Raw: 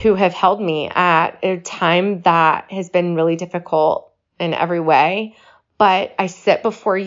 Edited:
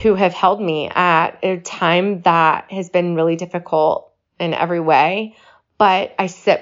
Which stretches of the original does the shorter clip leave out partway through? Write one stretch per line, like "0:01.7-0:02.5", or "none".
none